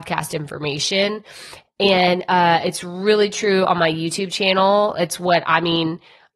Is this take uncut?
yes; 0 cuts

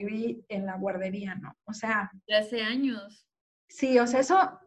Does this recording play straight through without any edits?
yes; 0 cuts

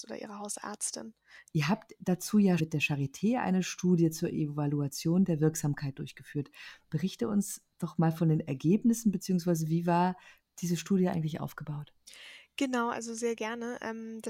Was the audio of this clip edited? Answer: yes; 2 cuts; at 1.5 s, 2.6 s

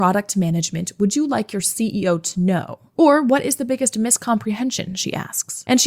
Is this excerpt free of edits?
yes; 0 cuts

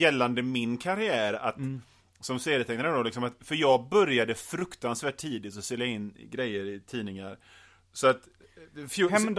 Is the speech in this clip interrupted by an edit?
yes; 1 cut; at 3.4 s

